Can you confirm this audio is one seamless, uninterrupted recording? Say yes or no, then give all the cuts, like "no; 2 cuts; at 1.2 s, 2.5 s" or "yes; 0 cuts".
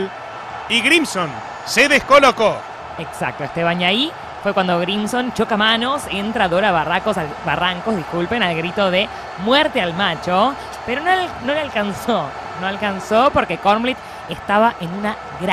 yes; 0 cuts